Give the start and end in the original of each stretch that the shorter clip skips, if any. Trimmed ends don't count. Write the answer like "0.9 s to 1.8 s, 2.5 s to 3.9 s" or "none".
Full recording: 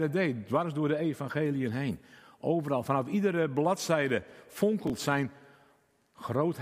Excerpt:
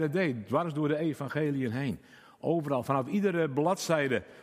none